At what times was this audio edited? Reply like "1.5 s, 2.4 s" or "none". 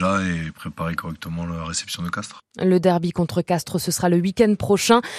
none